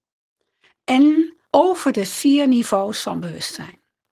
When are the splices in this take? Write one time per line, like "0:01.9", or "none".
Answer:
0:01.4